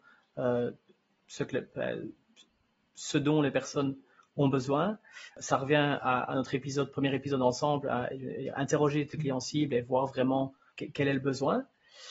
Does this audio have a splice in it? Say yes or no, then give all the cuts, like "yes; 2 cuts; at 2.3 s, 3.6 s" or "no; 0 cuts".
no; 0 cuts